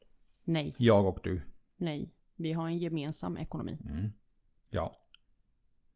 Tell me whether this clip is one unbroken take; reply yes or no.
no